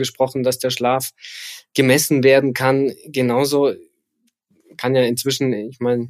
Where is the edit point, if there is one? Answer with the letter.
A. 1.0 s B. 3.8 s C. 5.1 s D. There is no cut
D